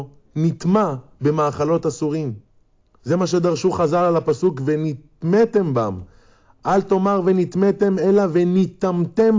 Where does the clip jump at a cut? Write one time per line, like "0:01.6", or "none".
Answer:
none